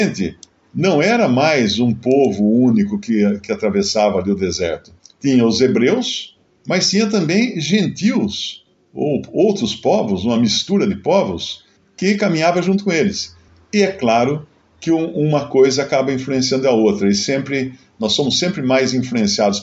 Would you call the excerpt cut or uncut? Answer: uncut